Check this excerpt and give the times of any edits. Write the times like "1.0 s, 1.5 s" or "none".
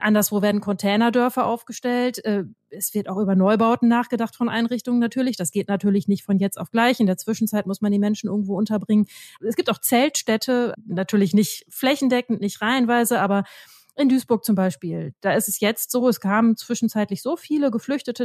none